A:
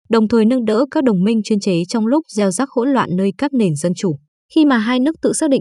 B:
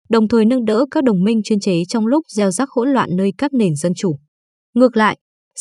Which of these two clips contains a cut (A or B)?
A